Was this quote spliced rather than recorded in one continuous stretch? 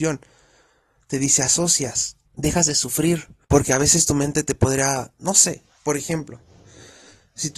yes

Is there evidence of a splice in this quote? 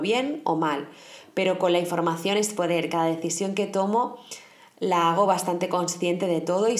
no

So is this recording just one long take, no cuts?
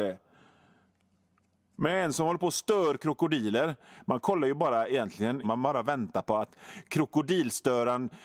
no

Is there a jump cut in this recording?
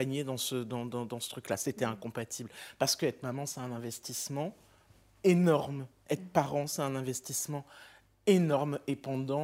no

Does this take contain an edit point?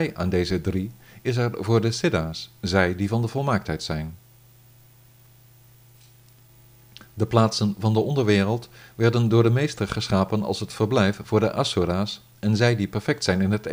no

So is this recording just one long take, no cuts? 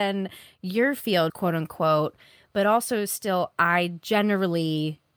no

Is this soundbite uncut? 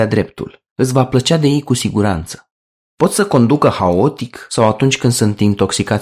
no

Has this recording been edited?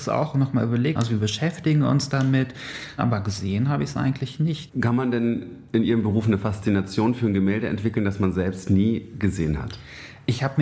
yes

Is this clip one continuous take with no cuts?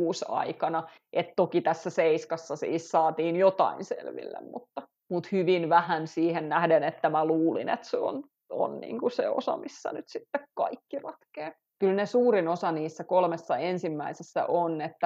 no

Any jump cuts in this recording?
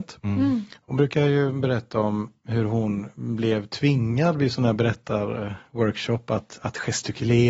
no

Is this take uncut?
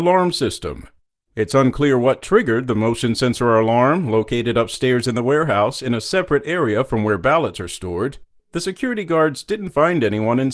yes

